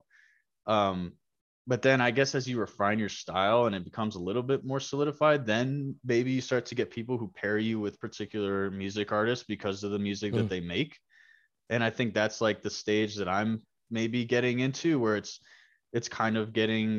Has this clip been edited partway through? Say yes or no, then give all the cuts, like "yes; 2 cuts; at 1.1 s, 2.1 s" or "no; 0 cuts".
no; 0 cuts